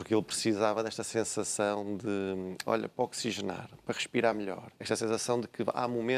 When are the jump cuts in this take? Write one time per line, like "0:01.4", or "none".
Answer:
0:04.8